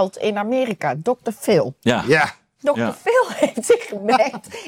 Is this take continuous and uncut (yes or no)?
no